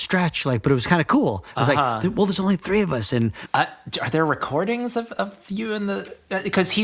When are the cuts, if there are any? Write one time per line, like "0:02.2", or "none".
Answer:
0:03.5